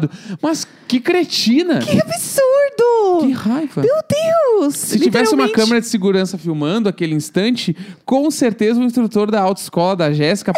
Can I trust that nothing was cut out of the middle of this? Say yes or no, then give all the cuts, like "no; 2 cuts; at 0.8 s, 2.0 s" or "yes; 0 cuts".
yes; 0 cuts